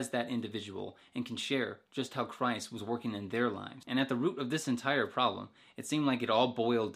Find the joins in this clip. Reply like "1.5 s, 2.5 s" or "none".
3.8 s

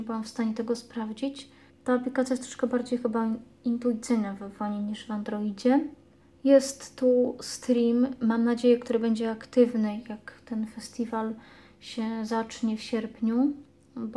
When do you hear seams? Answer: 1.7 s

